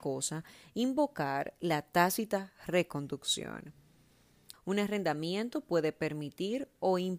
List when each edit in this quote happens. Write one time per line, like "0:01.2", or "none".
0:04.5